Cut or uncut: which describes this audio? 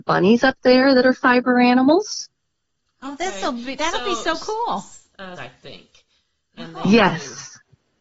cut